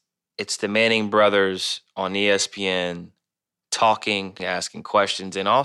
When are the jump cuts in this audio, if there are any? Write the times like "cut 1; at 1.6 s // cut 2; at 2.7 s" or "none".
cut 1; at 4.4 s